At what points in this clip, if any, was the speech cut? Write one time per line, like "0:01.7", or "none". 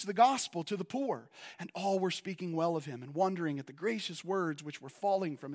0:01.5